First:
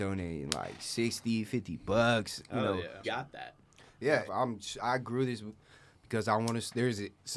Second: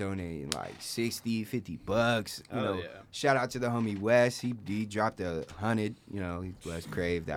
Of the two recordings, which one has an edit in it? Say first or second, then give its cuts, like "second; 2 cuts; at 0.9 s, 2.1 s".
first; 2 cuts; at 3.0 s, 4.3 s